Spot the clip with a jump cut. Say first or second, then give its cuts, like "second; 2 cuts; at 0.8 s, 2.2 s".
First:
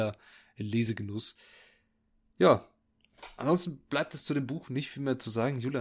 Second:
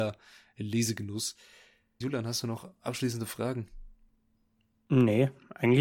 second; 1 cut; at 2.0 s